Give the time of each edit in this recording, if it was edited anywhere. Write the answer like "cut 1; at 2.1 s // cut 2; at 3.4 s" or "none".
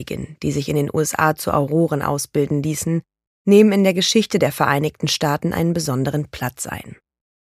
none